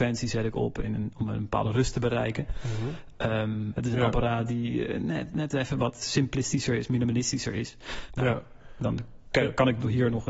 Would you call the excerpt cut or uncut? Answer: cut